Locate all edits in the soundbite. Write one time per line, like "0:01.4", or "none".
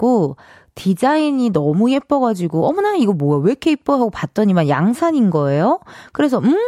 none